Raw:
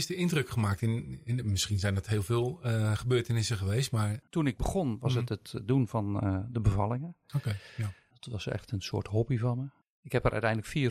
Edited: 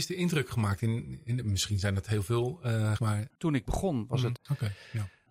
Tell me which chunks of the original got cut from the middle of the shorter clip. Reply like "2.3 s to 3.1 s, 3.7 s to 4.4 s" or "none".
3.0 s to 3.9 s, 5.3 s to 7.2 s

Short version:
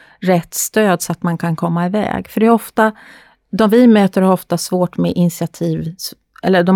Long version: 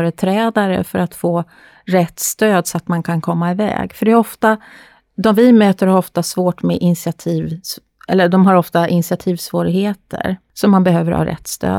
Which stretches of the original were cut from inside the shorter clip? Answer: none

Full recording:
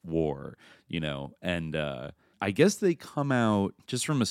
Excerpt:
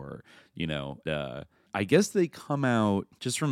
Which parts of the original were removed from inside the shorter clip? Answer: 1.4 s to 1.7 s

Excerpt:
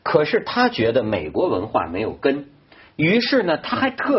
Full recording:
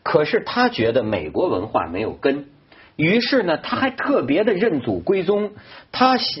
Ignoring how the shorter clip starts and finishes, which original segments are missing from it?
none

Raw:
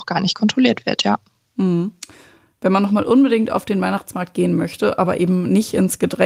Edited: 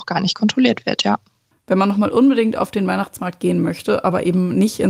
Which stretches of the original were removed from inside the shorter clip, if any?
1.5 s to 2.5 s

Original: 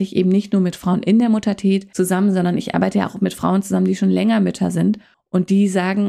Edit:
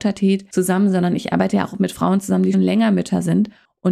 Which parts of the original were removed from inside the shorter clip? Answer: 3.9 s to 4.0 s

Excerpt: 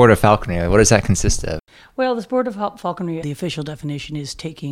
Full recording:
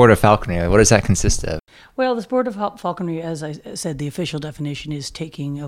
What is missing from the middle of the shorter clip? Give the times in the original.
3.2 s to 4.0 s

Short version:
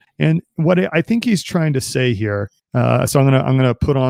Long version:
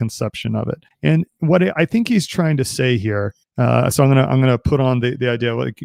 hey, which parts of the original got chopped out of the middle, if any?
none

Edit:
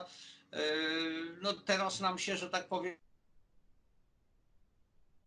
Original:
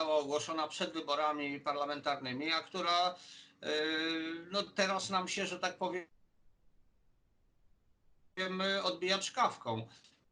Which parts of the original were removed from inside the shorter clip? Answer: none

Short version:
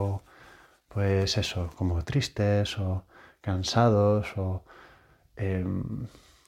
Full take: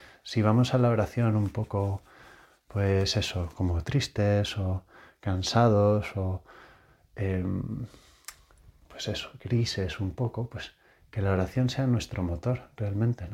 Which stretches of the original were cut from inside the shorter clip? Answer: none

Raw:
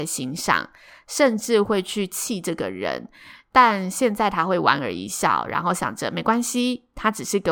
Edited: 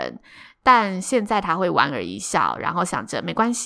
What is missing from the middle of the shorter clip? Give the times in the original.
none

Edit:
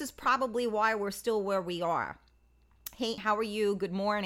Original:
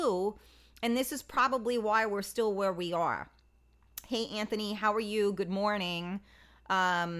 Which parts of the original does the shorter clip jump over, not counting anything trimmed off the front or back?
4.3 s to 4.7 s

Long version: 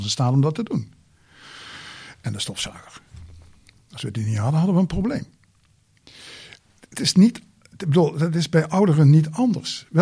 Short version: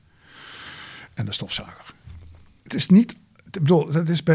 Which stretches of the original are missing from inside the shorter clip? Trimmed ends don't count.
3.7 s to 6.9 s

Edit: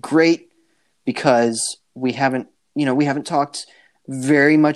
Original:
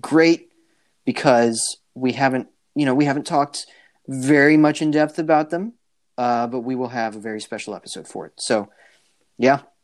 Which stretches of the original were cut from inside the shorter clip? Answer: none

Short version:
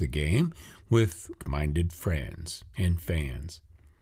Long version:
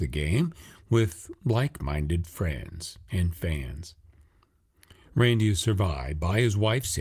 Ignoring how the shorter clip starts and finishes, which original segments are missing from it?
1.4 s to 1.7 s

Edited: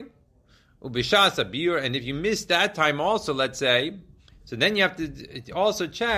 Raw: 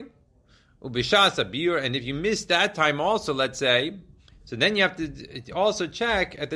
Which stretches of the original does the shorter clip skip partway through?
none

